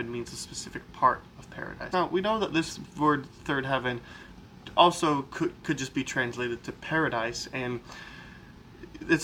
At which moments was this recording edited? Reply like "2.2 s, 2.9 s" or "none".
1.9 s